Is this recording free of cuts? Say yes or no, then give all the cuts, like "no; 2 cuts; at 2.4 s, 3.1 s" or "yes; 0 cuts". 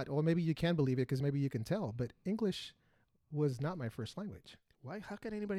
yes; 0 cuts